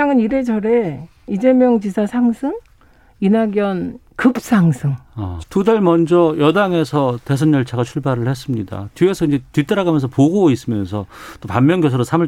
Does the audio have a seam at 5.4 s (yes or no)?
yes